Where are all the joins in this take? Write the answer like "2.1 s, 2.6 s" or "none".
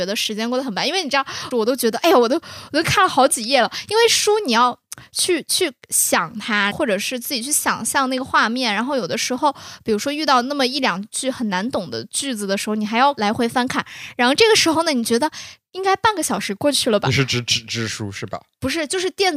1.5 s, 6.7 s